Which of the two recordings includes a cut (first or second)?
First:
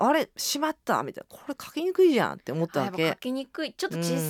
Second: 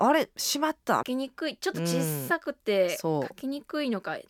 second